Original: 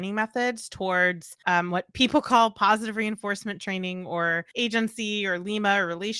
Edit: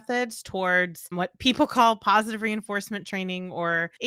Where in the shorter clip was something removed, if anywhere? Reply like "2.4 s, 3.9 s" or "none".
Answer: 1.1 s

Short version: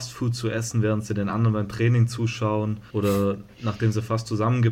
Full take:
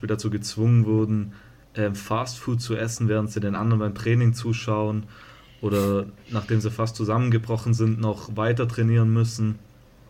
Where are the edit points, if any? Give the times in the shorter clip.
2.9 s

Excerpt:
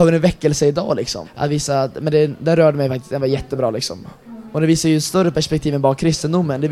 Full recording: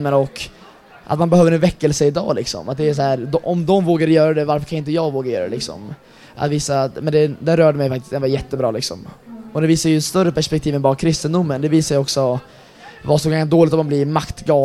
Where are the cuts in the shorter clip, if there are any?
1.2 s

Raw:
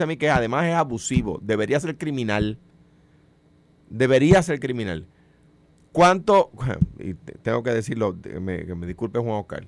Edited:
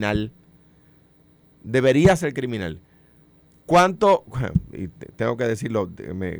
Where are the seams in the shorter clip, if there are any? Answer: none

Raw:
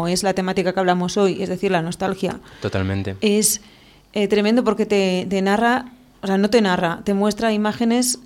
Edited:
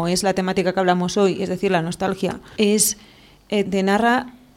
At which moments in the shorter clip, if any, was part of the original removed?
2.6 s, 3.7 s

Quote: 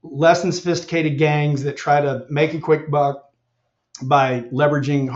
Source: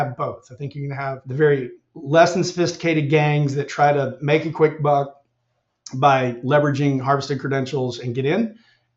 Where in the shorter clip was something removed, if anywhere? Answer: none

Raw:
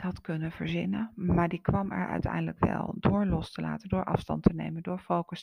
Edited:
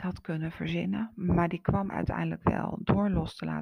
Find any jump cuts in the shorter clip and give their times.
1.9 s

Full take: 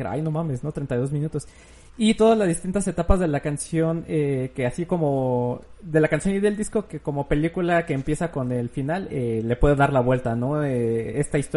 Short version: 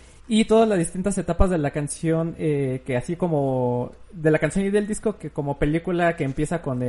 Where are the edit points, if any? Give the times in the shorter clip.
none

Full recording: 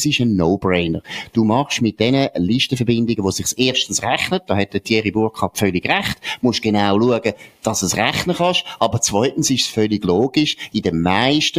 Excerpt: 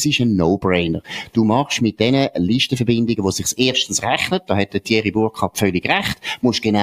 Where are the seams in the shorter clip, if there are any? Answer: none

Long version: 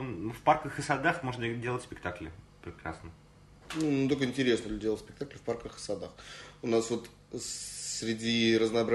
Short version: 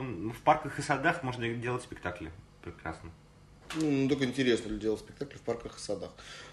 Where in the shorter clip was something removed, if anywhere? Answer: none

